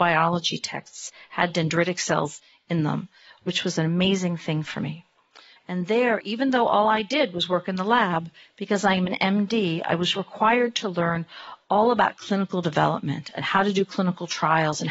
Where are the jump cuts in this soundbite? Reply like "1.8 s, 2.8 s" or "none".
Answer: 5.6 s